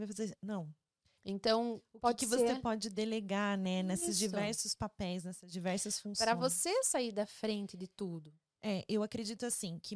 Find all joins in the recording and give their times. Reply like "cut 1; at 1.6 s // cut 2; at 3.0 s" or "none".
cut 1; at 1.2 s